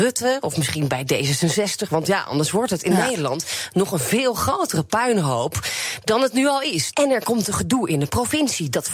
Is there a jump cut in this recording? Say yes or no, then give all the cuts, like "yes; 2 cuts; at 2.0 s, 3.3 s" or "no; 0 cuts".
yes; 1 cut; at 6.9 s